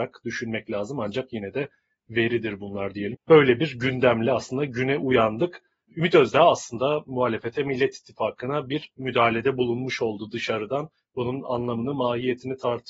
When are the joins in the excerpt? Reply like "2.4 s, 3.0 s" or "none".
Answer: 3.1 s

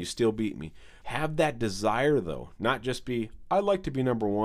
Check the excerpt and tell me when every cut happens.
1.0 s

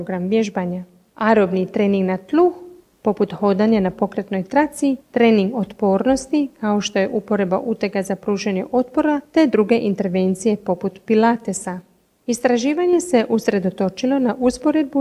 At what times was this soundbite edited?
none

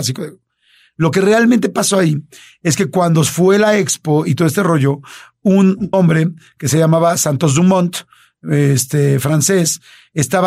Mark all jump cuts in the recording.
5.9 s

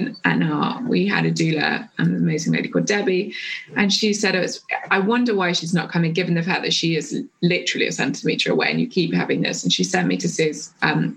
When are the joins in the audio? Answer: none

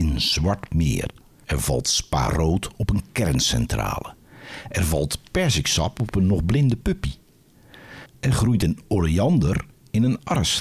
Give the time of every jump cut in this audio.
1.4 s, 8.1 s

